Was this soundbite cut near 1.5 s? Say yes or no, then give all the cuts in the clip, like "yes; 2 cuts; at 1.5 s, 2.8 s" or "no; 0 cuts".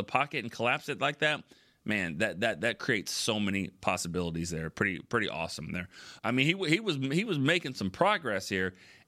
no; 2 cuts; at 6.2 s, 7.7 s